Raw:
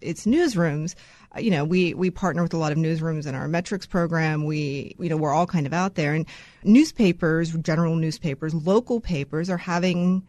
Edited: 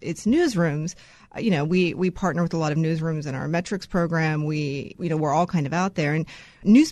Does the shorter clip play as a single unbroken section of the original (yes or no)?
yes